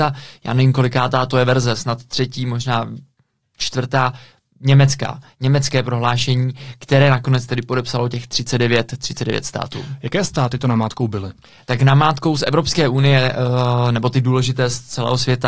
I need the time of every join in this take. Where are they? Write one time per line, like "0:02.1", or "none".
none

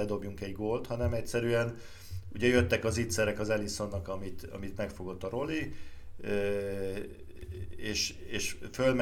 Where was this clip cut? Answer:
none

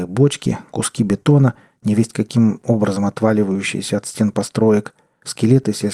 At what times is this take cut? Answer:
none

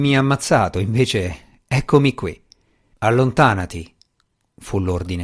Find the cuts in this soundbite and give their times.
0:02.9

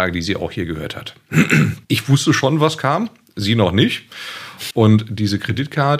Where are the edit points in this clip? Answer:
0:01.8
0:04.7

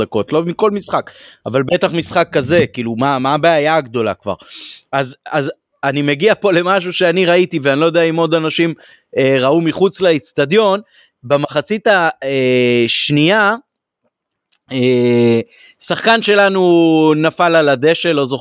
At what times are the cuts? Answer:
none

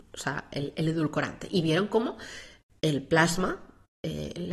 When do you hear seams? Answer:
none

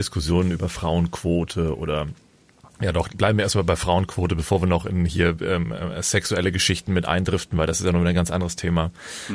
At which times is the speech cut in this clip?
none

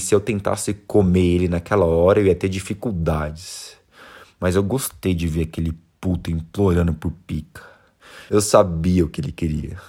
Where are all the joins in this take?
0:08.3

